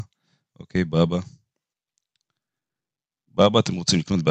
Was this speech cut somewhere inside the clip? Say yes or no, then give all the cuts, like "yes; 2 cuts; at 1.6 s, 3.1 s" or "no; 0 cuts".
no; 0 cuts